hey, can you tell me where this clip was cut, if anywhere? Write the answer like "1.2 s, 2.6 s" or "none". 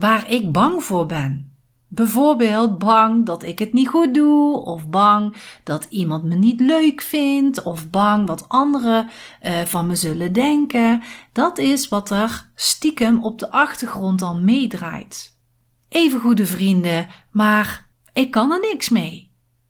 15.8 s